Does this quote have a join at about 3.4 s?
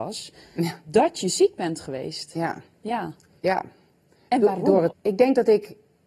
yes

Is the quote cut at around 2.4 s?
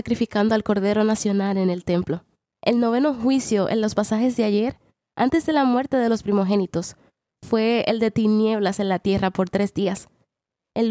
yes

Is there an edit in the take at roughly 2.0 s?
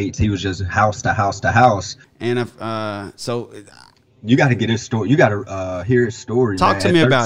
yes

